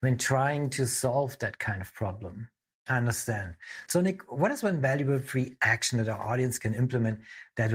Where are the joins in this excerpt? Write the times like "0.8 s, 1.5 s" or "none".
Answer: 2.7 s, 3.9 s